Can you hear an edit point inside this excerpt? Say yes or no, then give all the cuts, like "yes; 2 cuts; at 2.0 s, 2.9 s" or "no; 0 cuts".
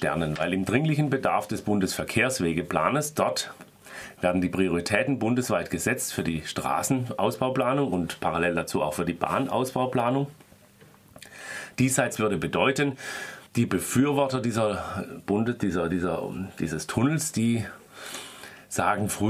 yes; 2 cuts; at 11.7 s, 13.5 s